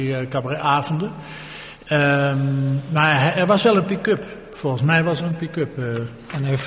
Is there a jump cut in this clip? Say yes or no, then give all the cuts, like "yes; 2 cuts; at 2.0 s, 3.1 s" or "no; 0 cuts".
no; 0 cuts